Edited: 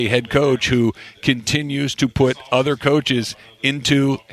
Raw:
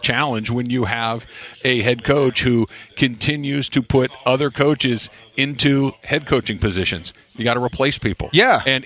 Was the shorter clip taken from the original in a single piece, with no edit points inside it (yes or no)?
yes